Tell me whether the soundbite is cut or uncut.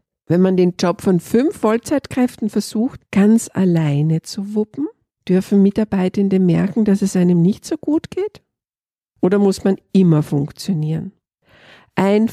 cut